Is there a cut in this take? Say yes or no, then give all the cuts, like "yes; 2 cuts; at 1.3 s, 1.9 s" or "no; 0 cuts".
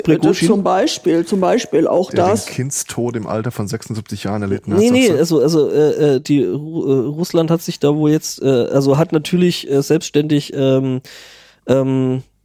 no; 0 cuts